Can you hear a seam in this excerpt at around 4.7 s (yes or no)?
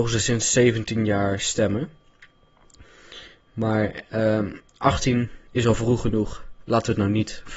yes